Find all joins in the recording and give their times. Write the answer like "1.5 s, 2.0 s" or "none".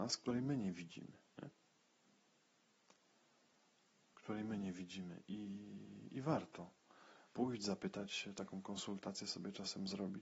none